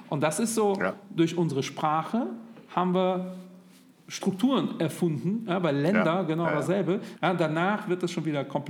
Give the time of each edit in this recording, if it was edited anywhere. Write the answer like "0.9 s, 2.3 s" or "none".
7.2 s